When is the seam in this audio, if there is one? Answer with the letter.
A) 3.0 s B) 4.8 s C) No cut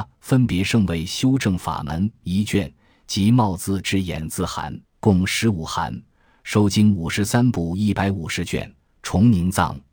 B